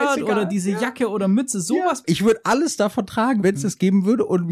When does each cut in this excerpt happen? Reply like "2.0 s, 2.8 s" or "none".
2.0 s, 3.4 s